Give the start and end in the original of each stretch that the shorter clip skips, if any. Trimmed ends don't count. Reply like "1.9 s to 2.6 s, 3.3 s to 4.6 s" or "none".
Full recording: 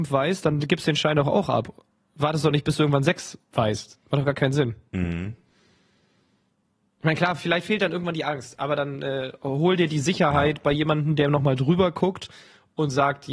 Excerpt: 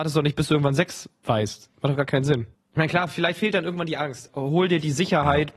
4.8 s to 6.8 s, 8.6 s to 9.4 s